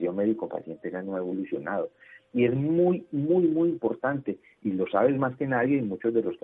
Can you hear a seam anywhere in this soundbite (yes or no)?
yes